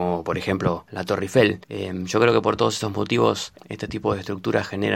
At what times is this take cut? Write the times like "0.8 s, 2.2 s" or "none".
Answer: 1.6 s, 3.6 s

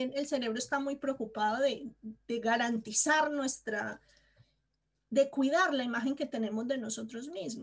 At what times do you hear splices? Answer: none

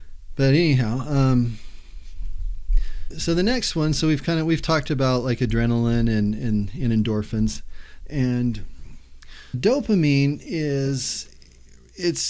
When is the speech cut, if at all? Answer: 3.1 s, 8.0 s, 9.5 s

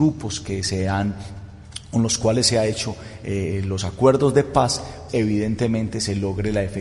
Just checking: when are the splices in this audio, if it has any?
5.1 s

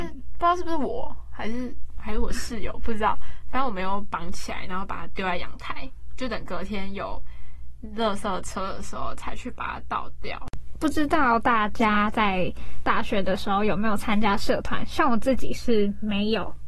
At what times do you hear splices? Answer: none

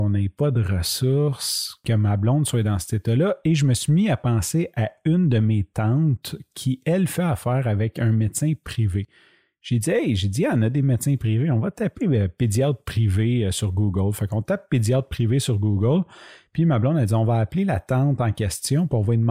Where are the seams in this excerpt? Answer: none

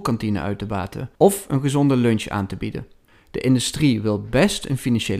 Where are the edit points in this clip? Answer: 1.2 s, 3.1 s

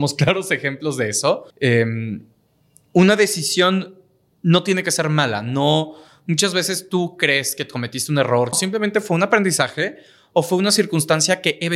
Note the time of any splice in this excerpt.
1.5 s, 8.5 s

